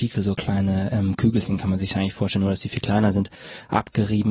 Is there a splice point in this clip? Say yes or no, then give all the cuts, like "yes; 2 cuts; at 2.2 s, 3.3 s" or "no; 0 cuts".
no; 0 cuts